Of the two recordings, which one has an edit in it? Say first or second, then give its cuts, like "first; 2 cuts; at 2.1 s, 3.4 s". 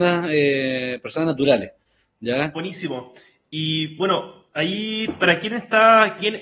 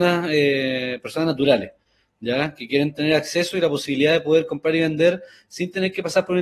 first; 1 cut; at 2.5 s